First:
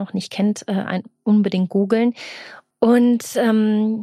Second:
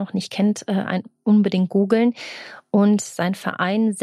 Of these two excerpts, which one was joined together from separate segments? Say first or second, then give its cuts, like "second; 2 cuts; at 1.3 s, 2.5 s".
first; 1 cut; at 2.7 s